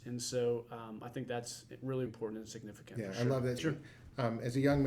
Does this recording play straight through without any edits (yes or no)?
no